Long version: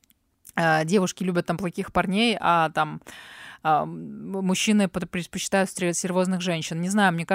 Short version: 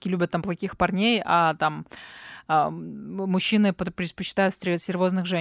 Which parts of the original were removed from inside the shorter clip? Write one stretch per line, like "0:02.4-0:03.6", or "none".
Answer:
none